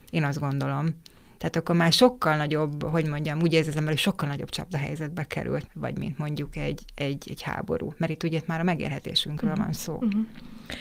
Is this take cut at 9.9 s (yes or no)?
no